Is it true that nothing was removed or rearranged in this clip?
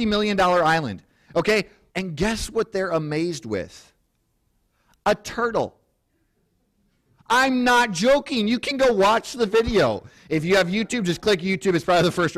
no; 1 cut; at 1.9 s

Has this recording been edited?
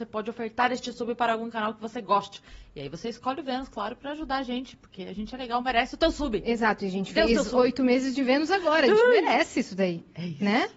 no; 0 cuts

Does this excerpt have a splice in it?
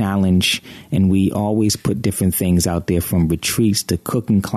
no; 0 cuts

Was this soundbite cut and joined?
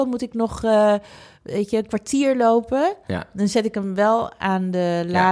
no; 0 cuts

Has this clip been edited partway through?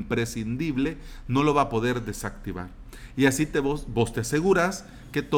no; 0 cuts

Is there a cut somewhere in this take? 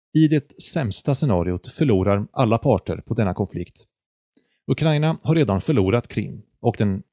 no; 0 cuts

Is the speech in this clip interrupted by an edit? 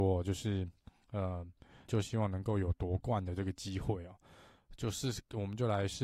yes; 1 cut; at 1.8 s

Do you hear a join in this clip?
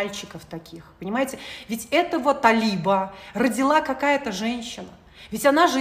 no; 0 cuts

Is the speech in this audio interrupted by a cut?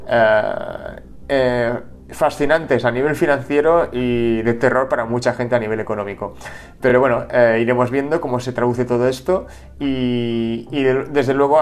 no; 0 cuts

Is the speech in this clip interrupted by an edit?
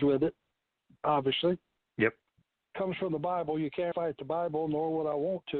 yes; 1 cut; at 3.9 s

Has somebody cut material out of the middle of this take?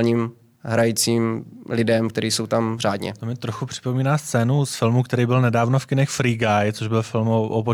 no; 0 cuts

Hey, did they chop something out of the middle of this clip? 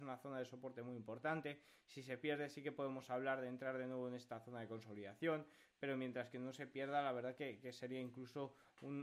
no; 0 cuts

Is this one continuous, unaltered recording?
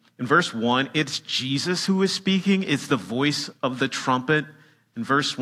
yes; 0 cuts

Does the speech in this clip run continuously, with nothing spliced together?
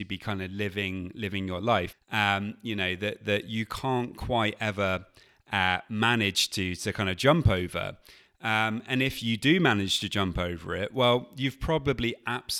no; 1 cut; at 1.9 s

